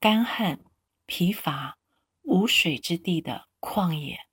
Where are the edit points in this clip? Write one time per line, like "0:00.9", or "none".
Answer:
none